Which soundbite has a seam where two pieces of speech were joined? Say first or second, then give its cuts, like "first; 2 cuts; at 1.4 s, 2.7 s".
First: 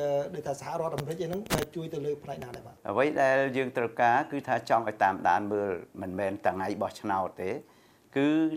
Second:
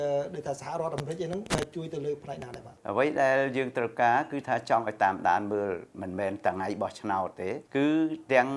second; 1 cut; at 7.7 s